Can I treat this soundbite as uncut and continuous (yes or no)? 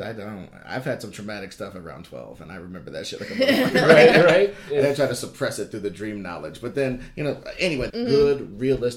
no